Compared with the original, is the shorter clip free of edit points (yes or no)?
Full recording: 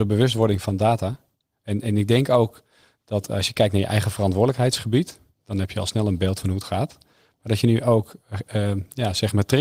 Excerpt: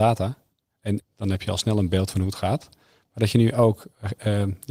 no